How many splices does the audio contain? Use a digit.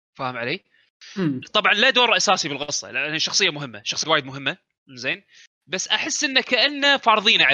2